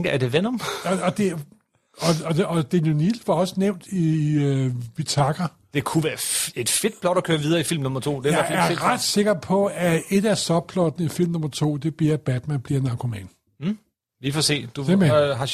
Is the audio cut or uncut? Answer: uncut